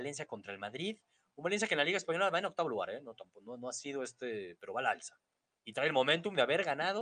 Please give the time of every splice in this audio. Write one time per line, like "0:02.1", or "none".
none